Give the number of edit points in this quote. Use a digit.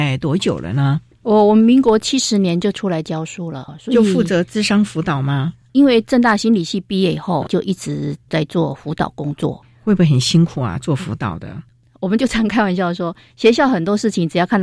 0